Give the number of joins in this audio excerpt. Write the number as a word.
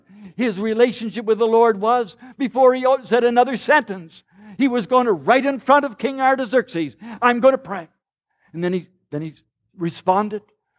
zero